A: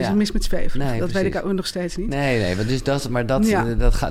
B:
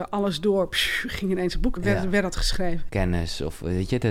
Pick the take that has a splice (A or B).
B